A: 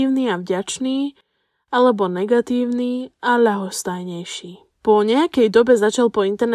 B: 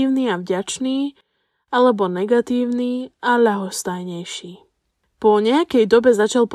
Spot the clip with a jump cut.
A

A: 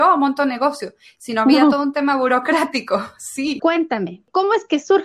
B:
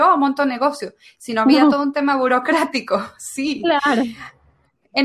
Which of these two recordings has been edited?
A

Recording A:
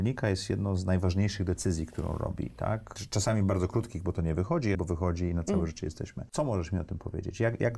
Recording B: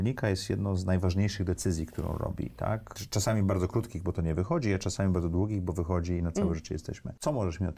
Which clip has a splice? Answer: A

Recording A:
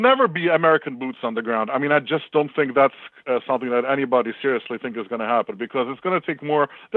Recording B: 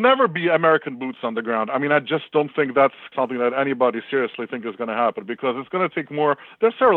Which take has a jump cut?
B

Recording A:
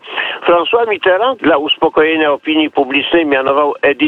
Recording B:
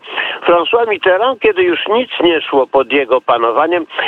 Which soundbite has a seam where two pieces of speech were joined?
A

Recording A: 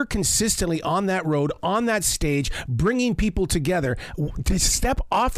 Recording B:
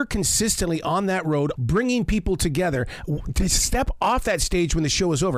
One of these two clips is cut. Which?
B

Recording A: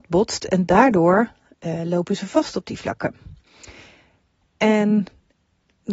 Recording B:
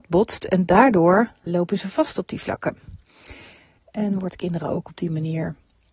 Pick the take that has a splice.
B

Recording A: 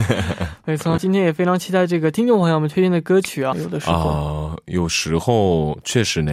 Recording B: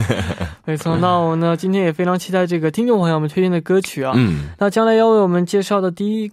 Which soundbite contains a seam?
A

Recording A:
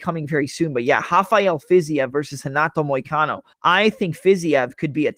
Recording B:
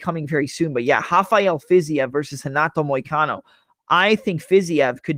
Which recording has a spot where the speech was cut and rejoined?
A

